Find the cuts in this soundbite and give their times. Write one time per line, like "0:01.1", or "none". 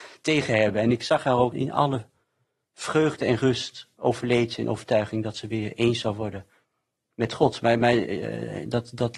0:01.5